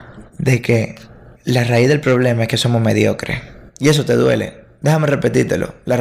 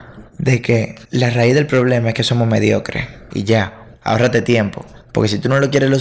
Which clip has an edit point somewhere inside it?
second; 2 cuts; at 1.0 s, 3.3 s

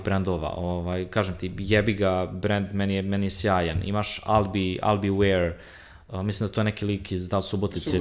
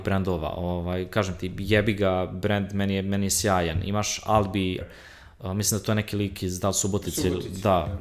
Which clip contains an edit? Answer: second; 1 cut; at 4.8 s

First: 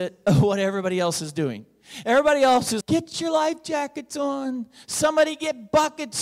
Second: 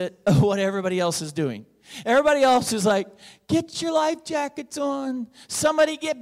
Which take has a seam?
first; 1 cut; at 2.8 s

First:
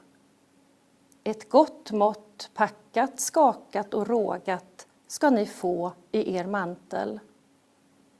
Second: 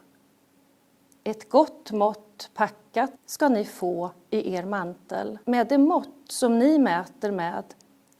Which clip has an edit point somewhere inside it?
second; 2 cuts; at 3.2 s, 5.4 s

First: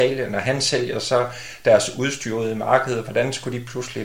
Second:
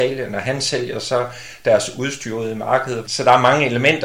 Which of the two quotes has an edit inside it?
second; 1 cut; at 3.1 s

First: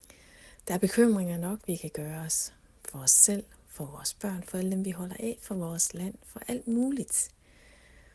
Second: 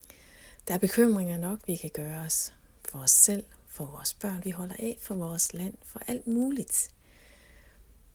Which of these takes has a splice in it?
second; 1 cut; at 4.4 s

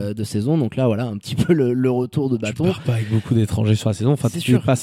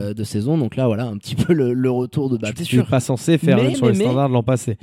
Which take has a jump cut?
second; 2 cuts; at 2.6 s, 3.7 s

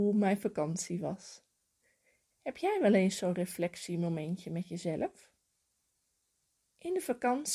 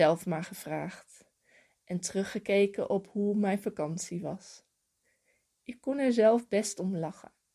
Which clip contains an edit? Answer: first; 1 cut; at 2.3 s

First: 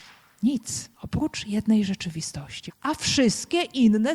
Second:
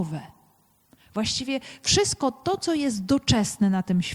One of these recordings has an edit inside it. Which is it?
first; 2 cuts; at 0.9 s, 2.7 s

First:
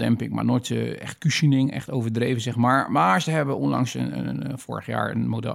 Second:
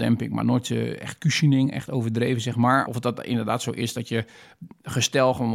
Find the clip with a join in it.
second; 1 cut; at 2.9 s

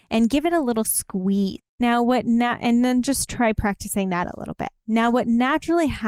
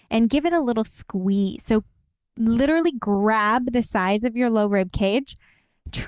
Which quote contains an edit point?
first; 1 cut; at 1.6 s

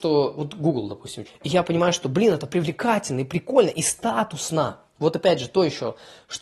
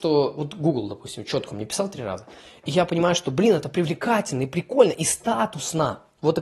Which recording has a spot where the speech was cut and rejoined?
first; 1 cut; at 1.2 s

